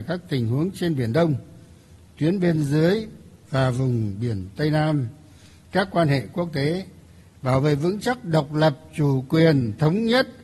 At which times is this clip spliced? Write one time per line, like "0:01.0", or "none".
none